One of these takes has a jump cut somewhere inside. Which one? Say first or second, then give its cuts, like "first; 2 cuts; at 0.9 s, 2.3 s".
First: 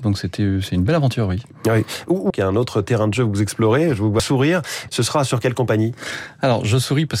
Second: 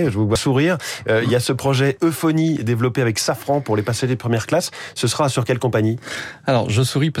first; 2 cuts; at 2.3 s, 4.9 s